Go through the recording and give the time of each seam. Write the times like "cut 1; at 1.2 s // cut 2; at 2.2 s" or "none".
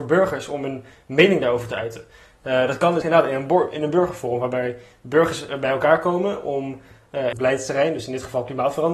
cut 1; at 3.0 s // cut 2; at 7.3 s